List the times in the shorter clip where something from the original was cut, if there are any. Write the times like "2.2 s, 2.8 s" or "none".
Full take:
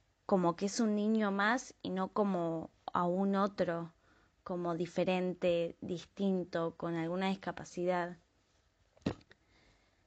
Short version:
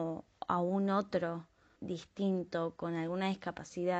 1.8 s